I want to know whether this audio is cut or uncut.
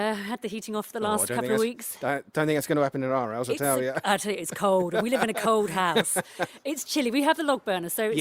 uncut